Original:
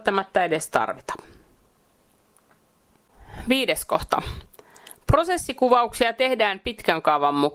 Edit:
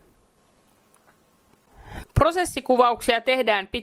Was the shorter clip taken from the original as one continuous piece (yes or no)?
no